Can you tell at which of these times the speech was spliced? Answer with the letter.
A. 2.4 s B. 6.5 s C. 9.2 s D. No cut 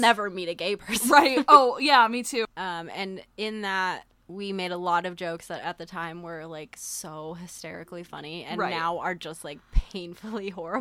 A